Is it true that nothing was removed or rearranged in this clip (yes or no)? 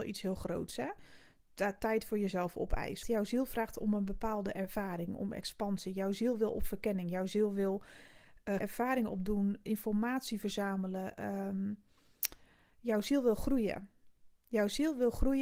no